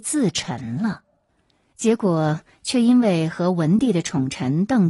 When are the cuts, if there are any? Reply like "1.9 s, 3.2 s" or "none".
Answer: 1.7 s